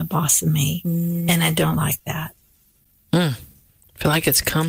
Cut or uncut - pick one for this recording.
uncut